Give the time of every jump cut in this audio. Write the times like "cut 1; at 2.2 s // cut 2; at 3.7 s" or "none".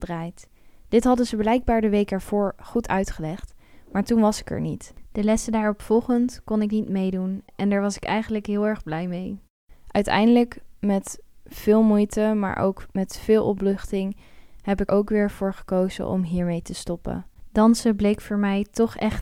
cut 1; at 14.9 s